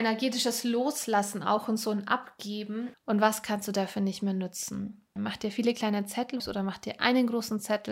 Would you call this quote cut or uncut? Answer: cut